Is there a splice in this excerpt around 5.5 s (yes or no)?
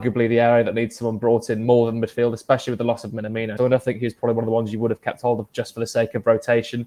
no